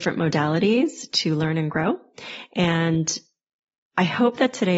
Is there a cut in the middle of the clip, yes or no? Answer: no